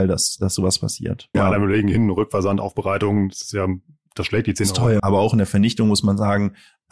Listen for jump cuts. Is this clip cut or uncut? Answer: cut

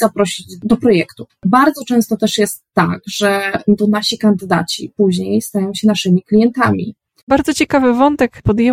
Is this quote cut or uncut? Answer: cut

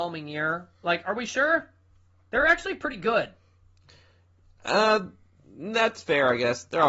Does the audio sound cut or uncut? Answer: uncut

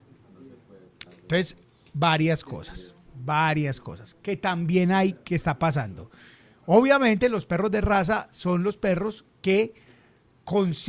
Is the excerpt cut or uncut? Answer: cut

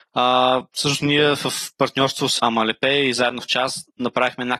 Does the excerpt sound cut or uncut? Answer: cut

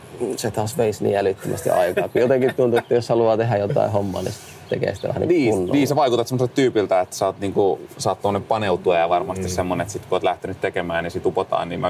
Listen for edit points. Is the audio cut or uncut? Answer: uncut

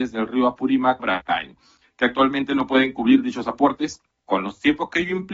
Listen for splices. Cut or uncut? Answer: cut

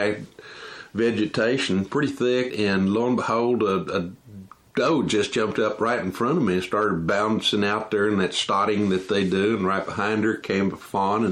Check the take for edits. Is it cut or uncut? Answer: cut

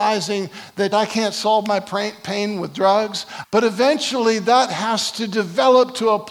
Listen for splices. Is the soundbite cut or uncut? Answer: cut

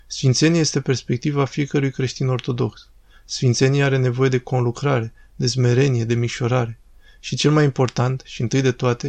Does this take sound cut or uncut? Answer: uncut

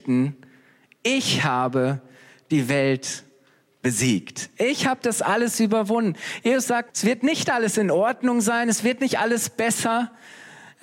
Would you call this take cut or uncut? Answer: cut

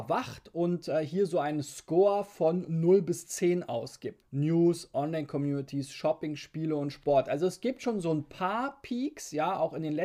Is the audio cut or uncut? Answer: cut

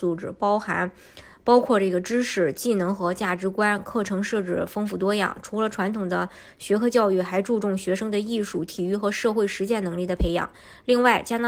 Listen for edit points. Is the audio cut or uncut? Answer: uncut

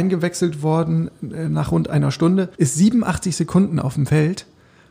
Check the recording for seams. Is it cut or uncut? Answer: cut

